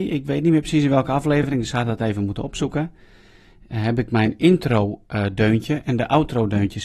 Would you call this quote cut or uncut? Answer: uncut